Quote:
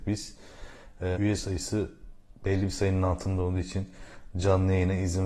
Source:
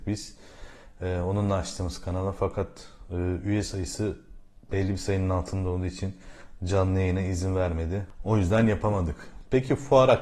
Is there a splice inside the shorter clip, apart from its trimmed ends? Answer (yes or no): yes